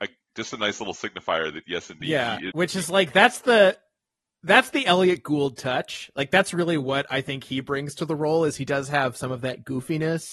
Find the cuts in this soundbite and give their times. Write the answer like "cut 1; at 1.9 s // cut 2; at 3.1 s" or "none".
none